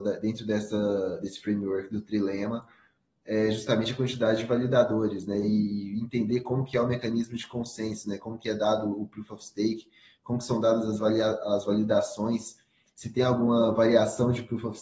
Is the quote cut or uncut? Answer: uncut